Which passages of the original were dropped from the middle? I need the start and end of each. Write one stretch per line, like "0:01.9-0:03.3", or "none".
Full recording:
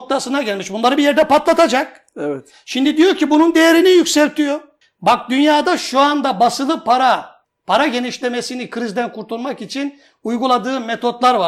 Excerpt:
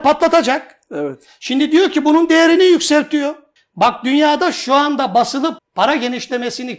0:06.8-0:07.5